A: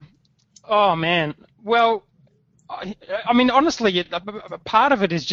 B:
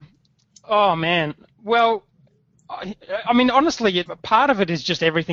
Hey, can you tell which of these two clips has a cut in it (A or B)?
B